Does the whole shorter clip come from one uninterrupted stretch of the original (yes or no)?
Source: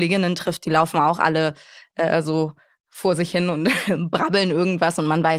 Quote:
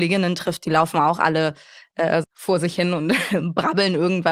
no